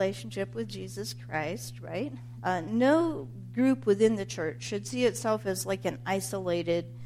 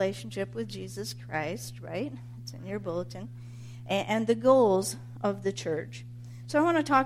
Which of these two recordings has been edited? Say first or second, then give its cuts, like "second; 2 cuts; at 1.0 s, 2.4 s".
first; 1 cut; at 2.4 s